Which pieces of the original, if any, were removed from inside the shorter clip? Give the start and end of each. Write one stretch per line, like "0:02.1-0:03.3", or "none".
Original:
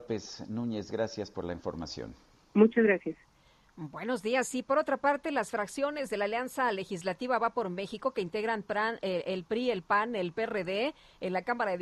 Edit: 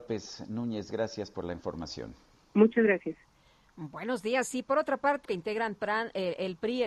0:05.2-0:08.1